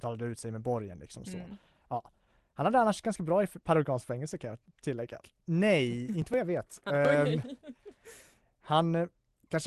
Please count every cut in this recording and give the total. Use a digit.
1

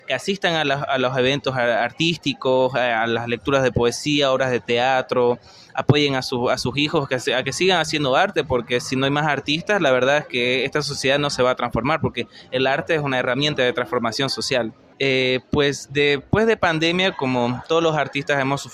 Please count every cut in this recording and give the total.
1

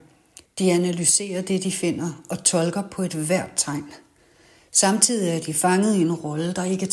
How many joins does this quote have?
0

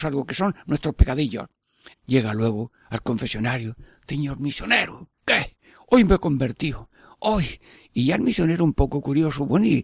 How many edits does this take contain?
1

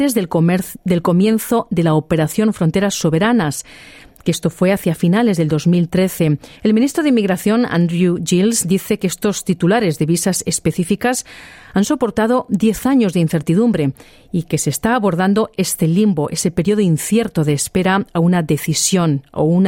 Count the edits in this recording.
1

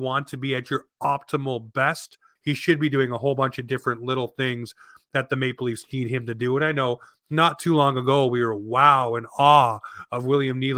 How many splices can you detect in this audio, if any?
1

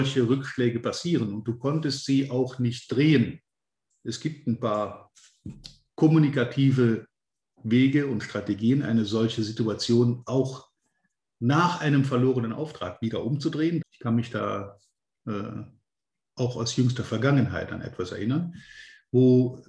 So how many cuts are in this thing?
1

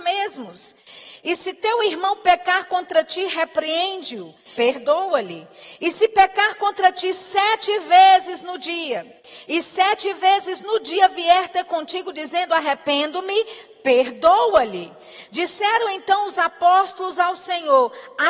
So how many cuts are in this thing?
1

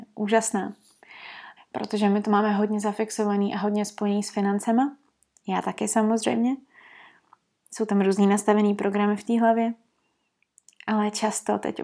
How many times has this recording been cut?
1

